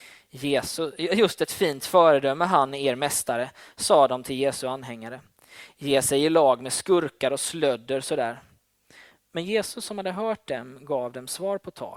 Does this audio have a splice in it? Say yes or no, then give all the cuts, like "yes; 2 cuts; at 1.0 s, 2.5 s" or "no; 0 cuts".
no; 0 cuts